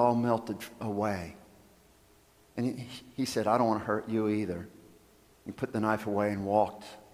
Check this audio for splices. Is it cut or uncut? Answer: uncut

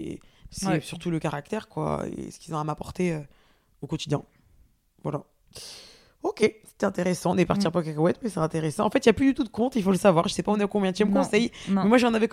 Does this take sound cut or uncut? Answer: uncut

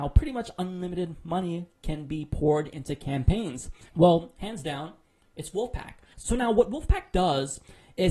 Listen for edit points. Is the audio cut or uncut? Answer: cut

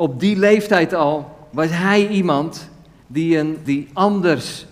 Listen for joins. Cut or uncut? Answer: cut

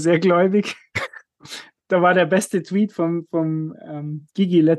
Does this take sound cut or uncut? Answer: uncut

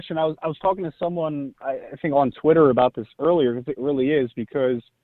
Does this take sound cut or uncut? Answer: cut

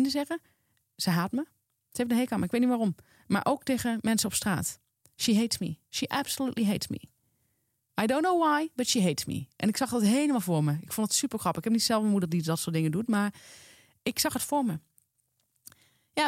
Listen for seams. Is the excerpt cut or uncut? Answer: uncut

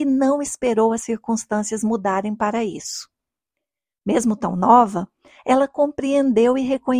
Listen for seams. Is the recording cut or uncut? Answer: uncut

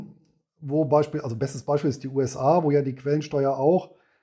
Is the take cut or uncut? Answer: uncut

